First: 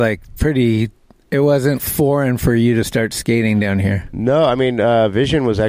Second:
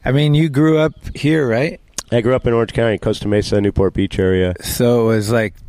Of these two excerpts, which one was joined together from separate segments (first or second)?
first